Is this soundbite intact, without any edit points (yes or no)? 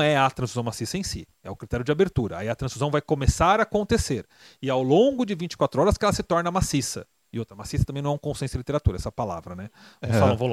yes